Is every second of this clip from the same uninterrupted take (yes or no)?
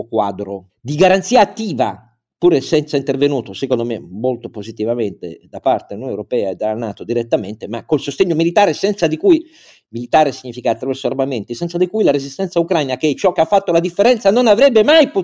yes